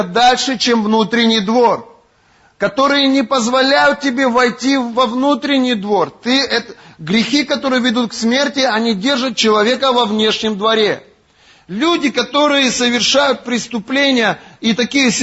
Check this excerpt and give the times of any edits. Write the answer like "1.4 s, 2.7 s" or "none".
none